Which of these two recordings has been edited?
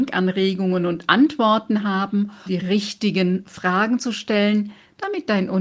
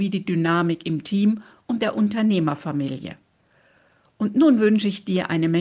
first; 1 cut; at 2.5 s

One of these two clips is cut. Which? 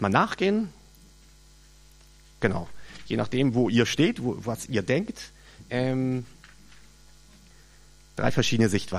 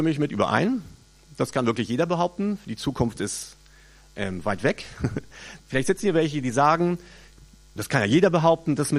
second; 2 cuts; at 5.6 s, 7.8 s

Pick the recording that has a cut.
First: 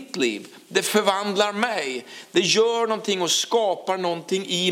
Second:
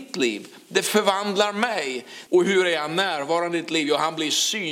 second; 1 cut; at 2.3 s

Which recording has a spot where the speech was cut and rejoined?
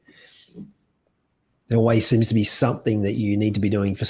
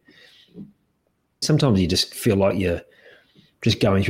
second; 1 cut; at 1.4 s

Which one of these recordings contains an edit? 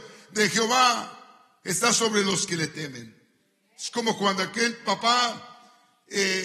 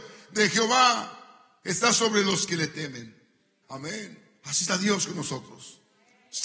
second; 1 cut; at 3.6 s

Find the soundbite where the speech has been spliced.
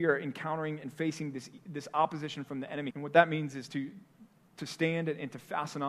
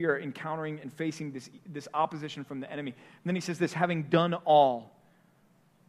first; 1 cut; at 2.9 s

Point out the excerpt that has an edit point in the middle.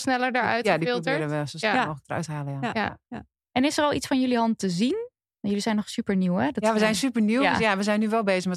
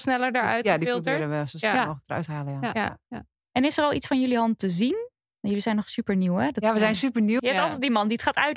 second; 1 cut; at 7.4 s

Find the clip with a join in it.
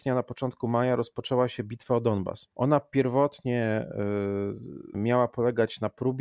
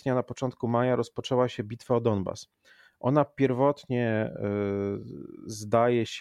first; 2 cuts; at 2.5 s, 4.9 s

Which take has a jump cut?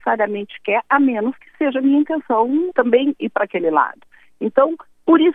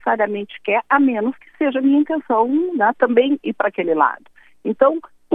first; 1 cut; at 2.7 s

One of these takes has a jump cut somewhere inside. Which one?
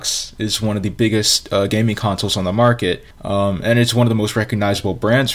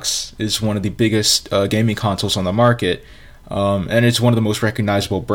first; 1 cut; at 3.1 s

